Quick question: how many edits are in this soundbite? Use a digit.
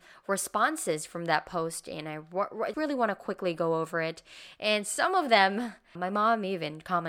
2